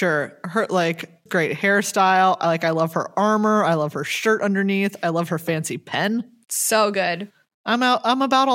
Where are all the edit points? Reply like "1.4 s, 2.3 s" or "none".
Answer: 1.3 s